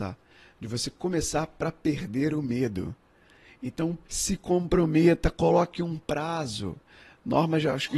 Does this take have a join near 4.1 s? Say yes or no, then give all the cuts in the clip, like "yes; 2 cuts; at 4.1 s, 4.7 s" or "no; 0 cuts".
yes; 1 cut; at 4.1 s